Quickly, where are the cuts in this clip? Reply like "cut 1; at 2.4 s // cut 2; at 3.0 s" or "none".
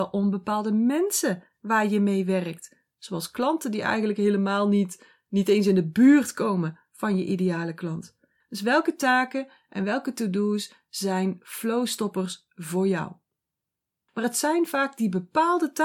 cut 1; at 8.4 s // cut 2; at 14.1 s